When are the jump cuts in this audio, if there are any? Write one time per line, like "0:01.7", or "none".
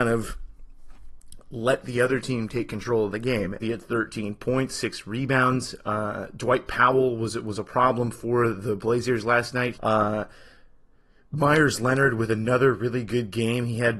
0:03.6
0:09.7